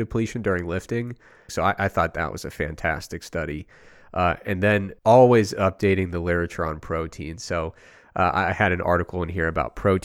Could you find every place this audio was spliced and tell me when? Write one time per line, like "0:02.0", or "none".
0:01.5
0:05.0